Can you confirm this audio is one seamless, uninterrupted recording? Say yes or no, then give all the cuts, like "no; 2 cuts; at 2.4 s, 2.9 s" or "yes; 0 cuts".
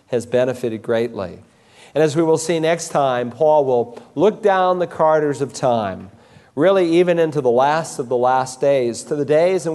yes; 0 cuts